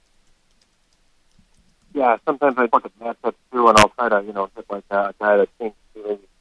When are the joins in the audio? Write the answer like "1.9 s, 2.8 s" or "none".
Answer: 2.7 s